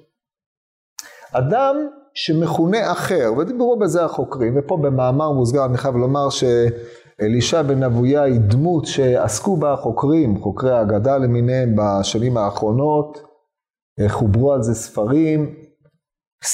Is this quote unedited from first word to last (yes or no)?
yes